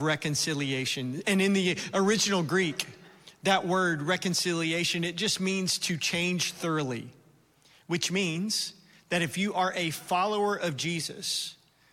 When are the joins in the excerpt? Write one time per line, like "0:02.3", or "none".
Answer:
none